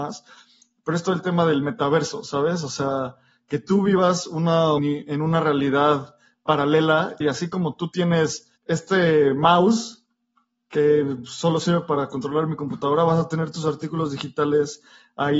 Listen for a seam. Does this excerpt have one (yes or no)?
yes